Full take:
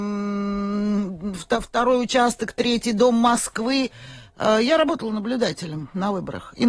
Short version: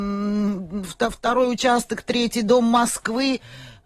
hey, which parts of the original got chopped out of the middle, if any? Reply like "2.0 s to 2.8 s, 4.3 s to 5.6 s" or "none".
none